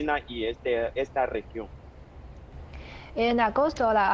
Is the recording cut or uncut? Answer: uncut